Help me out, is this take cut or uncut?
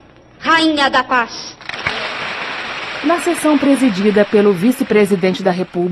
uncut